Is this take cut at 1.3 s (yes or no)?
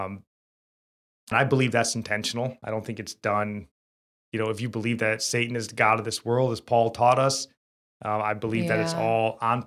yes